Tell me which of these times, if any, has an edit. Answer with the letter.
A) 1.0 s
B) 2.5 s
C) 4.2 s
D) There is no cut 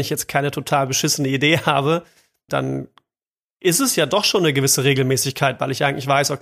B